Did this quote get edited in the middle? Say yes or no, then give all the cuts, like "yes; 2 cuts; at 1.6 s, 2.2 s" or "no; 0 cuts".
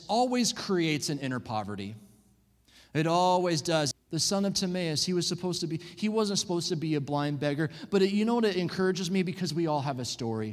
yes; 1 cut; at 3.9 s